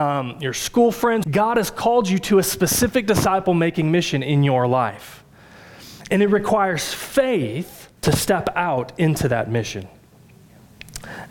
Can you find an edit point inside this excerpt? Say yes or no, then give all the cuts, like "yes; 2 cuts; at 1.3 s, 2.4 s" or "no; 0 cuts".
yes; 2 cuts; at 1.2 s, 8.0 s